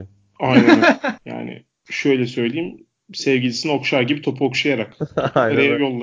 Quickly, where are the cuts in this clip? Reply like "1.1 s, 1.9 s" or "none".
1.2 s